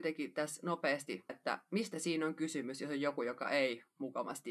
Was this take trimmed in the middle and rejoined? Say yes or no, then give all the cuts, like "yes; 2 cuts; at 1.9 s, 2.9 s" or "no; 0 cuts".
yes; 1 cut; at 1.3 s